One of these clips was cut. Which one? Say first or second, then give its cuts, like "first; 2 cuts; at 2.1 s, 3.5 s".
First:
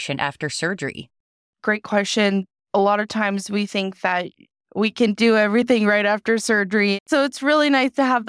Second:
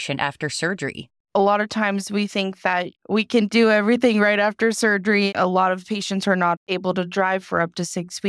second; 3 cuts; at 1.2 s, 3.0 s, 5.3 s